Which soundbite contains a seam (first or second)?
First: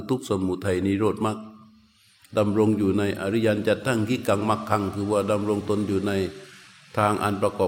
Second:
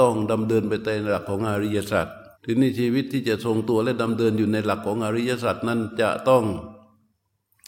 second